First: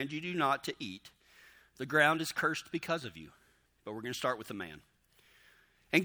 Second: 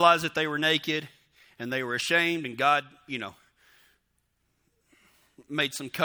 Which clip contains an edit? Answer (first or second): first